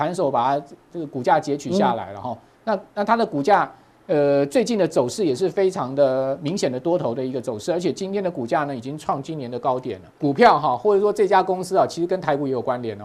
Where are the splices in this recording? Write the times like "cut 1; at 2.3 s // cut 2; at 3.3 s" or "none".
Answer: cut 1; at 10.1 s